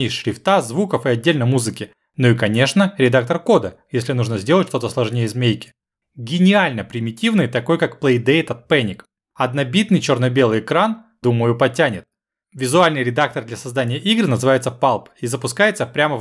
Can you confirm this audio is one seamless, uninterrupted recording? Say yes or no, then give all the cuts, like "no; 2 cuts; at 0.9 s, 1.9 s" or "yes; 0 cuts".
no; 2 cuts; at 6.0 s, 11.2 s